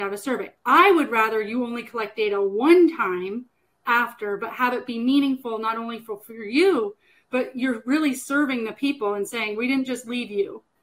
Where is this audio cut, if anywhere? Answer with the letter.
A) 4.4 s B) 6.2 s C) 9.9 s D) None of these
D